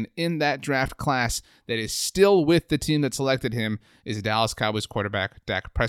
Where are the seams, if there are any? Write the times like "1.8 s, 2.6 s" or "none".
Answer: none